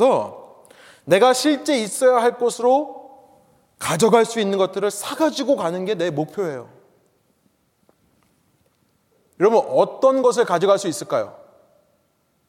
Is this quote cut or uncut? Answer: uncut